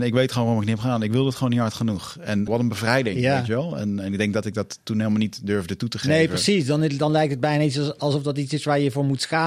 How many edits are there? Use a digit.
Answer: 1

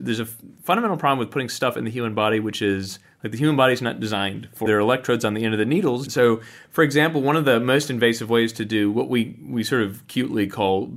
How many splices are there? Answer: 2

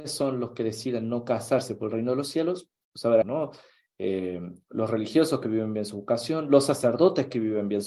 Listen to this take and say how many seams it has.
1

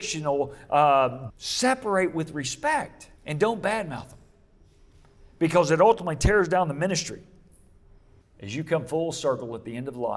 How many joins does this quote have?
3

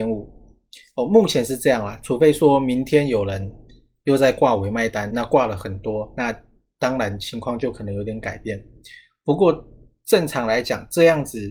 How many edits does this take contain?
0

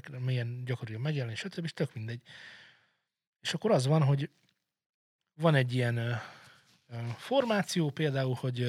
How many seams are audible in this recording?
0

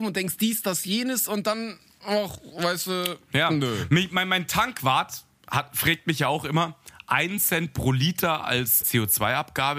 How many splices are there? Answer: 1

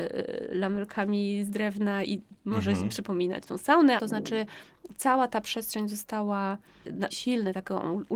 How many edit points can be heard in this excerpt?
3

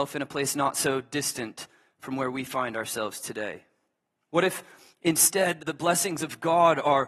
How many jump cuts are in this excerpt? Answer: 2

